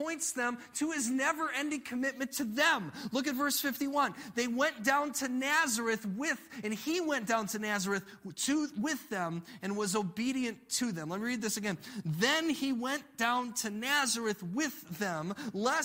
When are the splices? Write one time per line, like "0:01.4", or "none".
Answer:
none